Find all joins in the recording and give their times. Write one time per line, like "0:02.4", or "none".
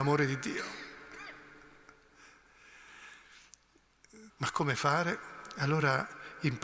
0:04.3